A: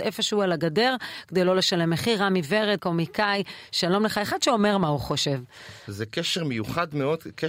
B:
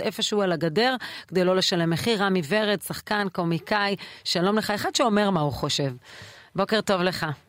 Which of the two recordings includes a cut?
A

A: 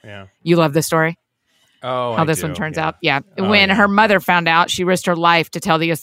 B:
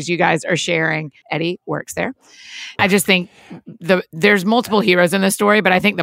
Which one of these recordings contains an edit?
B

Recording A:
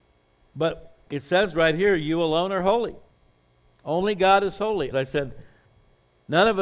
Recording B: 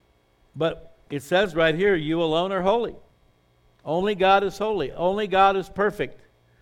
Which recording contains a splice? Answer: A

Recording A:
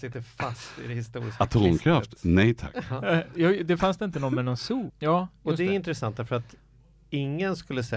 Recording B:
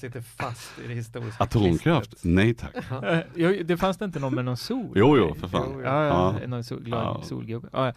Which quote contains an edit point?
A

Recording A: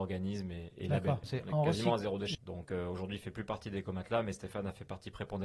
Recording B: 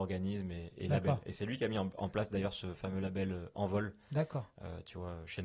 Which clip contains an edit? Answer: A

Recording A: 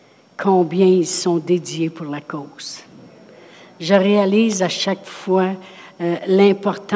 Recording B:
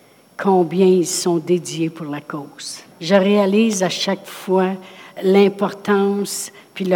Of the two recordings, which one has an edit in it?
B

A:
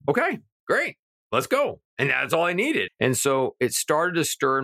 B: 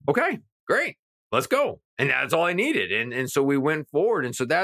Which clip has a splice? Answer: A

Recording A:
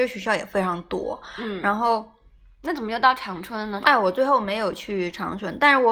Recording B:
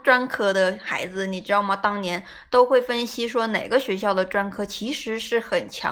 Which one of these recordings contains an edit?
A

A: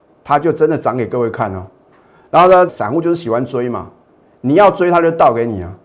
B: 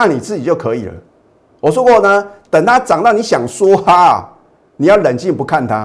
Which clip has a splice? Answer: A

